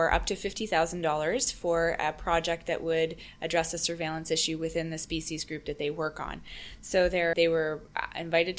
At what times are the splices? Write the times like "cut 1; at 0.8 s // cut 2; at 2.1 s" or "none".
cut 1; at 7.3 s

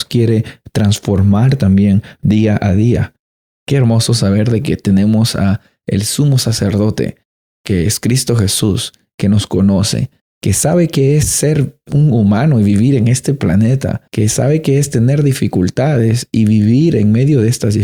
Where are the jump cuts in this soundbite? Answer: cut 1; at 3.5 s // cut 2; at 14.1 s

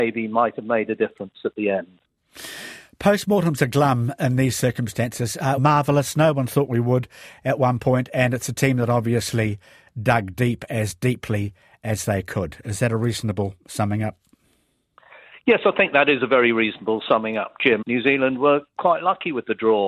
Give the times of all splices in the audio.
cut 1; at 5.6 s // cut 2; at 17.8 s

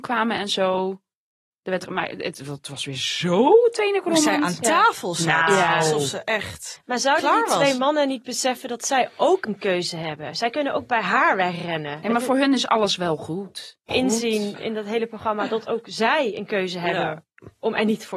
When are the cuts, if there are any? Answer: cut 1; at 1.8 s // cut 2; at 13.9 s

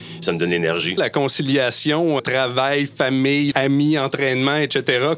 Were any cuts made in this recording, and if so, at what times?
cut 1; at 1.0 s // cut 2; at 2.2 s // cut 3; at 3.5 s

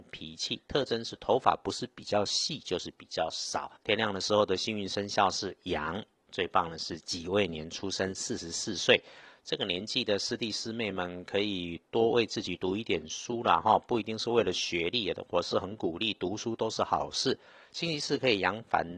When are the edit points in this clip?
cut 1; at 3.8 s

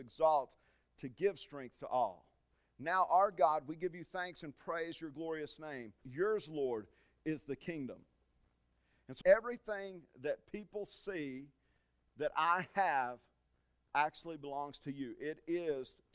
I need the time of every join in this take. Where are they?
cut 1; at 6.0 s // cut 2; at 9.2 s

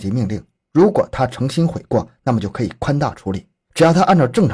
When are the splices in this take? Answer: none

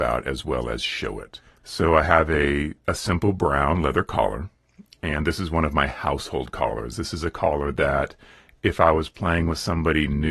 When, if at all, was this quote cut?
none

